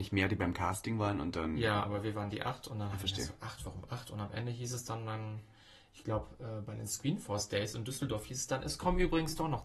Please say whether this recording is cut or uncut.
uncut